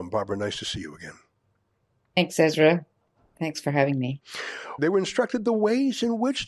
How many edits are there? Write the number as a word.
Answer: one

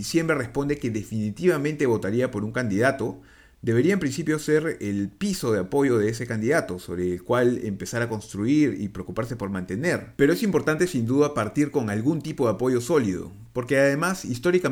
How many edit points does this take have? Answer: one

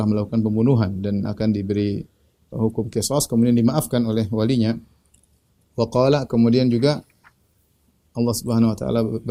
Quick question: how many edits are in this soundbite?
one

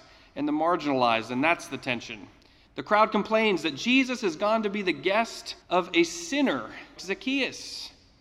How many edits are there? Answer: three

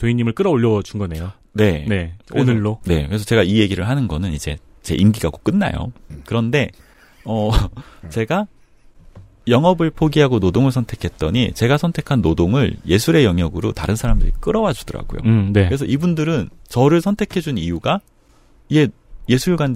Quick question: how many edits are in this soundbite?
one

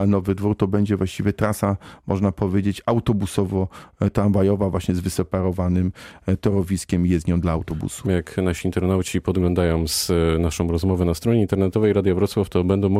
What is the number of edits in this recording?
one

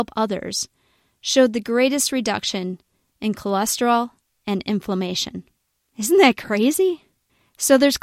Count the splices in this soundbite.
zero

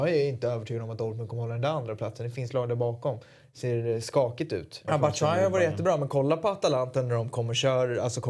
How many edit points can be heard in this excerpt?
one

